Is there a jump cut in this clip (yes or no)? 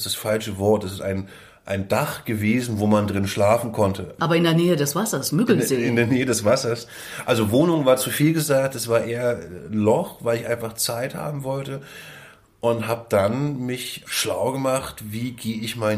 no